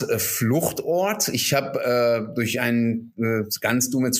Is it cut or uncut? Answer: uncut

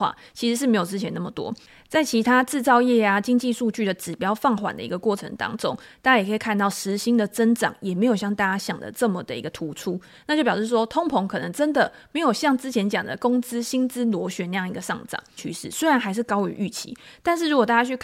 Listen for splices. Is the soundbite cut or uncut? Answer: cut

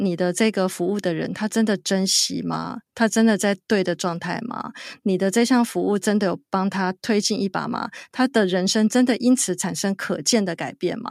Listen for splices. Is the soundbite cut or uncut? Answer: uncut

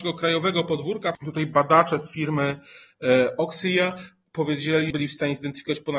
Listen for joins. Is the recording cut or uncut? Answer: cut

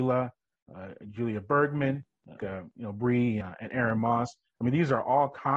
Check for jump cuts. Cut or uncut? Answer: cut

